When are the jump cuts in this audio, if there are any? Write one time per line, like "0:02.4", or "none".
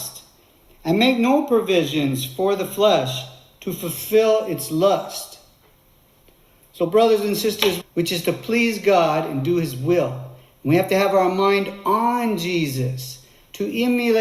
0:07.8